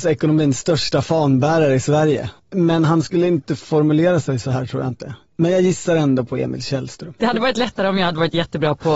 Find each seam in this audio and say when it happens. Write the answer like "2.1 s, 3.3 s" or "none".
2.4 s, 7.2 s